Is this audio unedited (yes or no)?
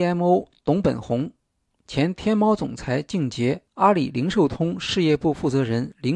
no